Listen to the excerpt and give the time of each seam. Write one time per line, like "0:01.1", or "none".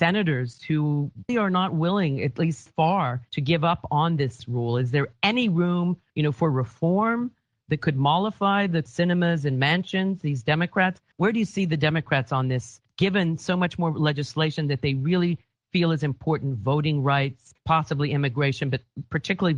0:01.3
0:02.7

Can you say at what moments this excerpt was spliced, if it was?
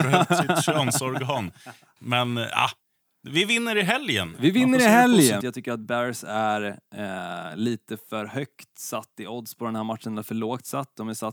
0:02.0
0:05.4

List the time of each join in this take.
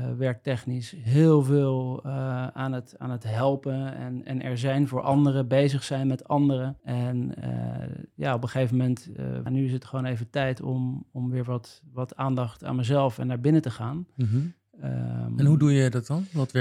0:06.8
0:09.5

